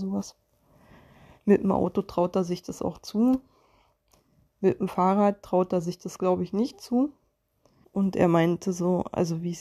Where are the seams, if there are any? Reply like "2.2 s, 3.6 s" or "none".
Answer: 7.8 s